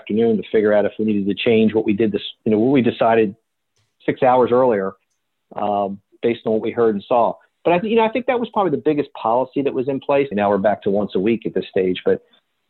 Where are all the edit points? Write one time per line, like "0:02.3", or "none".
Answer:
0:10.3